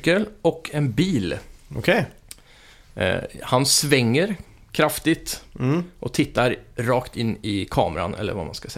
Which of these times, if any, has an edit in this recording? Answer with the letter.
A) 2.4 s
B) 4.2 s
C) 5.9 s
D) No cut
D